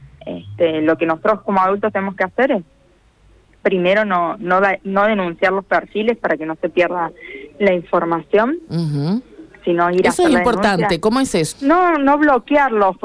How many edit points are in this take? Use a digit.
1